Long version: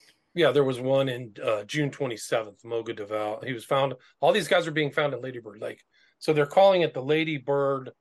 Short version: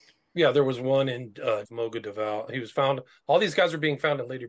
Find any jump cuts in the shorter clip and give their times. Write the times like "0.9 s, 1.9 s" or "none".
1.6 s